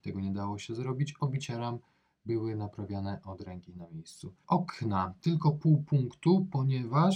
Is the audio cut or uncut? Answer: cut